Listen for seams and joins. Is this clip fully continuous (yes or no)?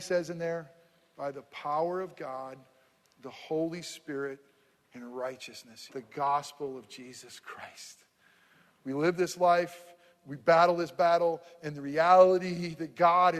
no